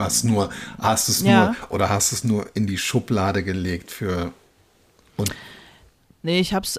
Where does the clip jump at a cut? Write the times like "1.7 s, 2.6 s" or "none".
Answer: 1.7 s